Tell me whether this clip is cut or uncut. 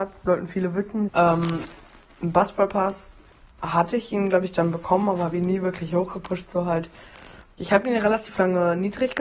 cut